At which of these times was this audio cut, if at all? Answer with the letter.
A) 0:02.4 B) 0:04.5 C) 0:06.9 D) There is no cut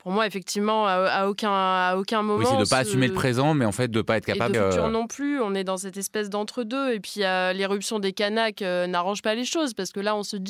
B